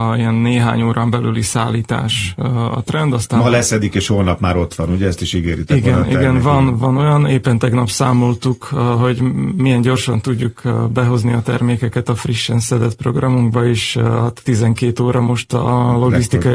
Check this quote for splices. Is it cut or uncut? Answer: uncut